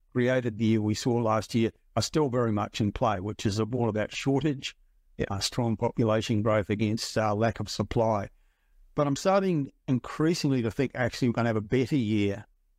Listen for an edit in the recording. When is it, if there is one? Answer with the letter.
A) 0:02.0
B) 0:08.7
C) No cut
C